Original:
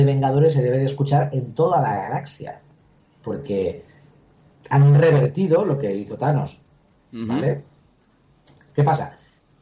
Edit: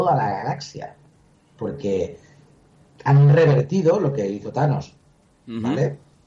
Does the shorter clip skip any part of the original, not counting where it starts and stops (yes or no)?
no